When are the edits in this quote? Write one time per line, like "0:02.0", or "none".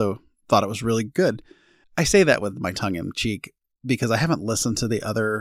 0:01.8